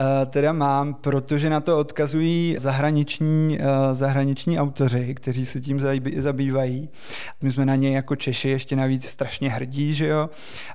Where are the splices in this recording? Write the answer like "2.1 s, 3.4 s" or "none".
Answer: 2.6 s, 7.4 s